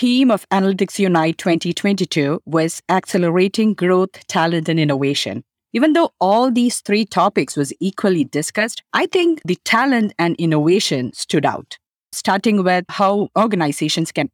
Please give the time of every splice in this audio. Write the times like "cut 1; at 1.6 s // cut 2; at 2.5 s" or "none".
cut 1; at 8.9 s